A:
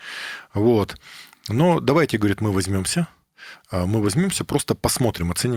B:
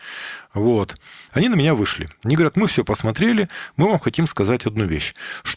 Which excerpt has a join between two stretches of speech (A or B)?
B